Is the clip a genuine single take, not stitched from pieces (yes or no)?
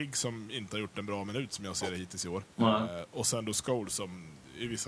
no